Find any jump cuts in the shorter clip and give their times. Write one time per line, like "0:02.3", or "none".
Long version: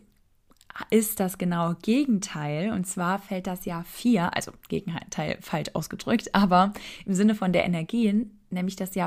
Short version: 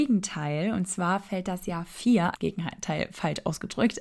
0:02.3